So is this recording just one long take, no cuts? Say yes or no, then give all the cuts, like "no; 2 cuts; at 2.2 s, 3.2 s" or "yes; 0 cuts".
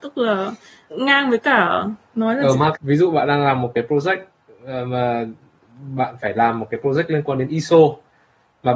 no; 2 cuts; at 0.9 s, 2.7 s